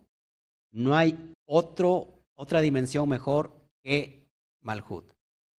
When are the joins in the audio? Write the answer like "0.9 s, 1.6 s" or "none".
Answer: 1.3 s